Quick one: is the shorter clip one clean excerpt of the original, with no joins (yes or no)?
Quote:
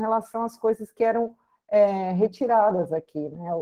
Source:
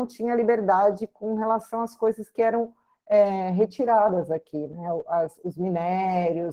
yes